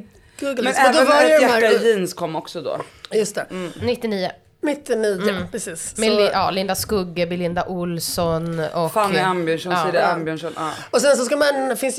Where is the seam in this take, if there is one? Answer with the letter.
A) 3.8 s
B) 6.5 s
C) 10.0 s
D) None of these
D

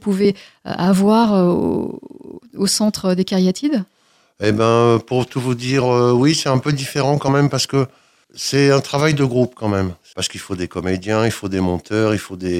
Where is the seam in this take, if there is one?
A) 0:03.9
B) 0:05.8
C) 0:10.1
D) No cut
C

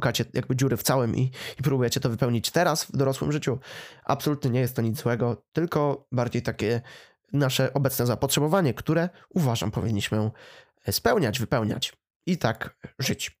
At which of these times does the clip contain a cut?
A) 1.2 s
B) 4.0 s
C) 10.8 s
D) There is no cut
D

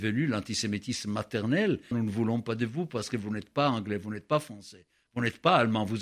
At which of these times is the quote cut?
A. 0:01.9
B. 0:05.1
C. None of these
A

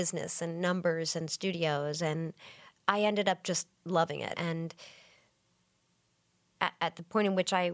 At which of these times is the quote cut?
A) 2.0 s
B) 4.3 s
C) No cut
B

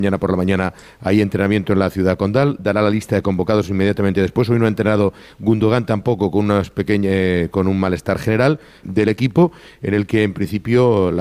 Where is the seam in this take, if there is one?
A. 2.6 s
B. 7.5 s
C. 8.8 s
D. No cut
C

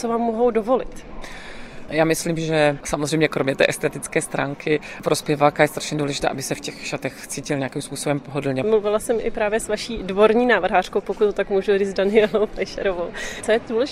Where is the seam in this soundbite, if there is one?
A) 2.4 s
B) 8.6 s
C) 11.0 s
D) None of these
B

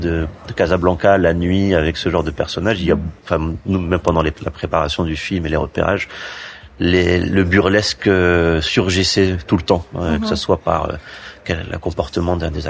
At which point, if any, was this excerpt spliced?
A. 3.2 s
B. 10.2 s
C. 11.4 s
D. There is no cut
A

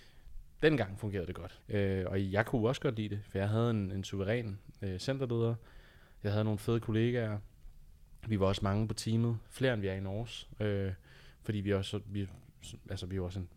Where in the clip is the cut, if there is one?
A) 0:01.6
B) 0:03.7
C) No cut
A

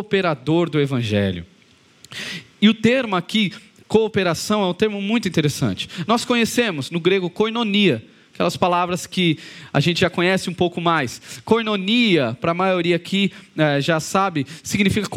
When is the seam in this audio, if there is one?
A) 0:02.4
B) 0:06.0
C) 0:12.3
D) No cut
D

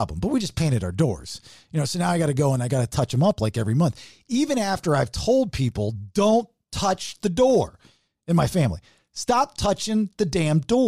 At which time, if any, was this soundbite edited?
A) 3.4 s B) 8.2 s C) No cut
C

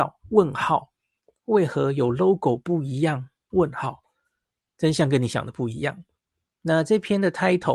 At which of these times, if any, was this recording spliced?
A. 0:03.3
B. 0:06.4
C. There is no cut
B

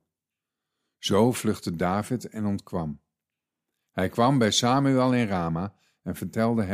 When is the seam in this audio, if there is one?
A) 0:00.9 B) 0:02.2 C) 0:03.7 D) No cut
D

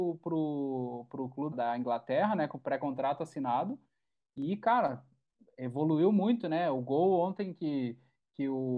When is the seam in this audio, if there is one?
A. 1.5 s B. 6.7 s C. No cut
A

